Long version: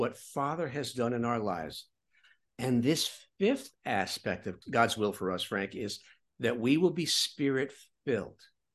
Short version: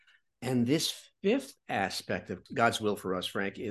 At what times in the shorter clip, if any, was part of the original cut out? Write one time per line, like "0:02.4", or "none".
none

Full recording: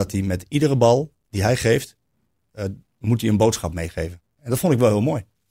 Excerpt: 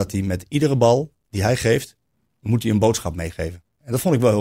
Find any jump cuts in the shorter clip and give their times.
0:02.3

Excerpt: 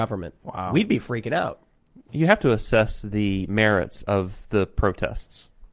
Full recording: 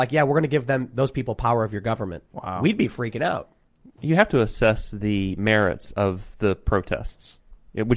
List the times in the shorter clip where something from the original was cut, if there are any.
none

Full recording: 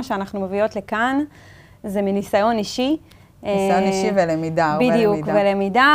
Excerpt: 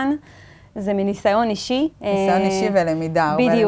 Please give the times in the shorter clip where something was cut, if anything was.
0:01.9

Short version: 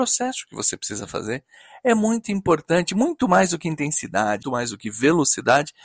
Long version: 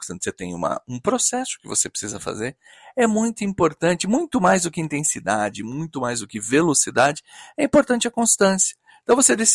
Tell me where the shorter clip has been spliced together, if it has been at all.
0:04.4

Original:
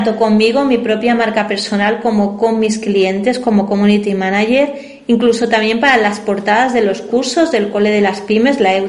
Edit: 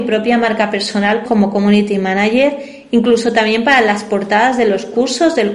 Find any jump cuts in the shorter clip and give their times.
0:01.3

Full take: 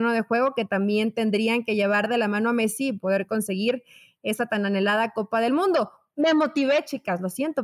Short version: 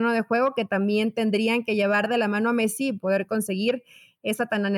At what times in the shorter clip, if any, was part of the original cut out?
none

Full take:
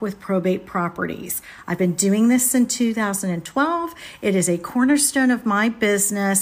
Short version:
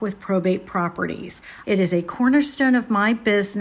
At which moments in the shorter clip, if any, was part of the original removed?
0:01.6

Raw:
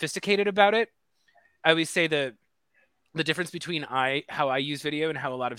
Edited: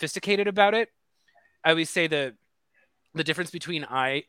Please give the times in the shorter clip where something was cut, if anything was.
none

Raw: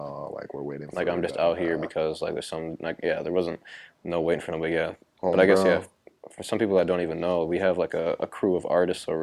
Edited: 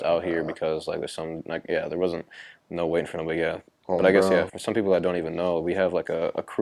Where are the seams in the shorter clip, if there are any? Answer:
0:04.5

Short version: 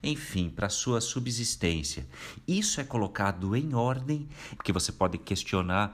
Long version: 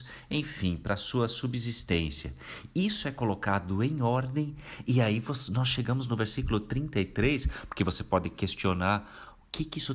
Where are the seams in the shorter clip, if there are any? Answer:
0:04.6

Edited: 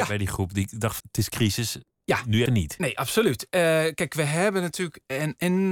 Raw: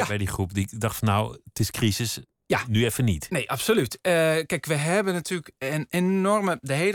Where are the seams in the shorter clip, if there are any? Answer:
0:01.0
0:02.5

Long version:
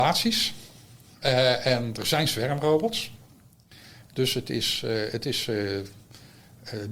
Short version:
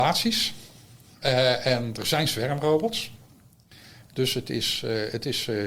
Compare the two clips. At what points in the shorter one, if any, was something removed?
none

